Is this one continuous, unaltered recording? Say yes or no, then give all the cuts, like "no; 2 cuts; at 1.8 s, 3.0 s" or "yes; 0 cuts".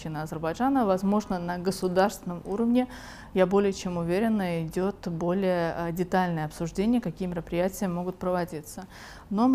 yes; 0 cuts